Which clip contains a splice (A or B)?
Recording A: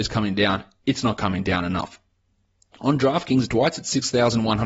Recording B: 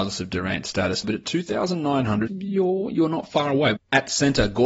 B